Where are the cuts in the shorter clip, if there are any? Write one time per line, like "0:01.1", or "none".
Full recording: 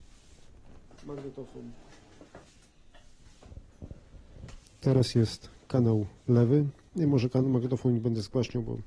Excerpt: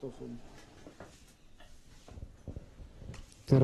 none